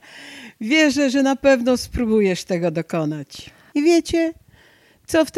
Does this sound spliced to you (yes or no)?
yes